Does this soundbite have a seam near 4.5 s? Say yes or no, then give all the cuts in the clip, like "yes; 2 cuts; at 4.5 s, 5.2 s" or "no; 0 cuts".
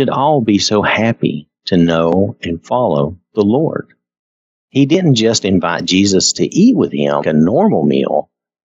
yes; 2 cuts; at 4.5 s, 7.2 s